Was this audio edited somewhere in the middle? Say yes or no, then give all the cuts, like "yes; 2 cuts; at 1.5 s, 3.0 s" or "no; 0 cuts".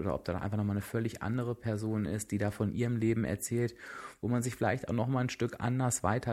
no; 0 cuts